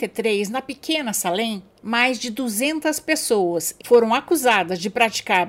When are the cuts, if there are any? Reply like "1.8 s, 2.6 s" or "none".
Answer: 3.8 s